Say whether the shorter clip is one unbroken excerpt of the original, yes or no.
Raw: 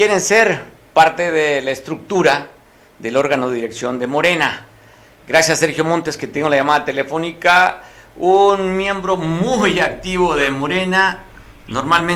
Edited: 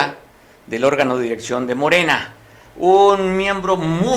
no